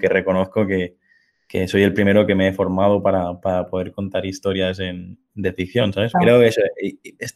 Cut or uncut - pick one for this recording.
cut